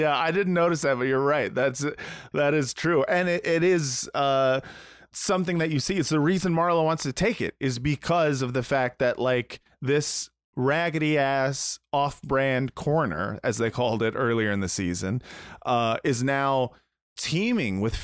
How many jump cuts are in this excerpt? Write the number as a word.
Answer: zero